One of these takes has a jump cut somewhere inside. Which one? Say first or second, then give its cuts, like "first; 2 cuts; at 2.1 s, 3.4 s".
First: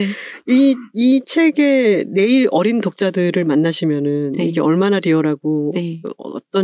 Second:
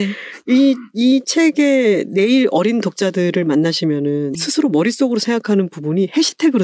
second; 1 cut; at 4.4 s